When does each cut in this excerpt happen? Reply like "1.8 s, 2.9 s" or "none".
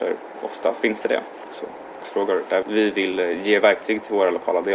1.5 s, 2.6 s